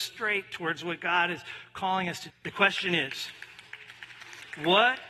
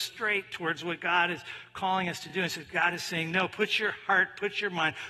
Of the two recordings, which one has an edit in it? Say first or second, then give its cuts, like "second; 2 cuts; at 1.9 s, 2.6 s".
first; 1 cut; at 2.3 s